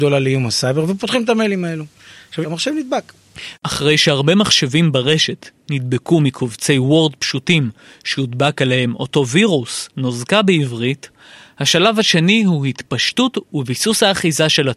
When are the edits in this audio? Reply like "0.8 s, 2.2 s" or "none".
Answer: 2.4 s, 3.5 s